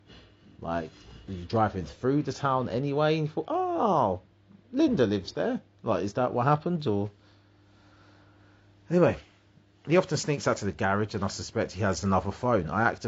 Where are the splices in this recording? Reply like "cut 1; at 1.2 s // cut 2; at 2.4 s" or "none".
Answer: none